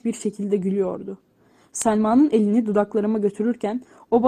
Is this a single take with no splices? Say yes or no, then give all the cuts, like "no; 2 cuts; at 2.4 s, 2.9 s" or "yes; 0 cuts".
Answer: yes; 0 cuts